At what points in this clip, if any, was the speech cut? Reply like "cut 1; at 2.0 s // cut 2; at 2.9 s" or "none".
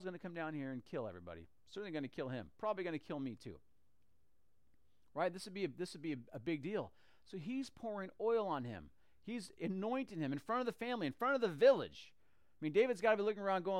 none